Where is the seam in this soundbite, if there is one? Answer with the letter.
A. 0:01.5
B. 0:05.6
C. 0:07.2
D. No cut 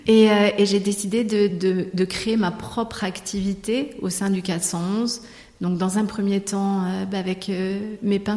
D